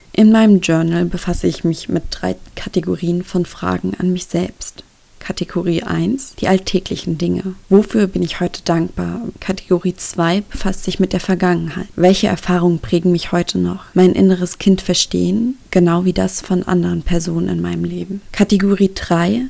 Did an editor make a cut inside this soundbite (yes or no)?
yes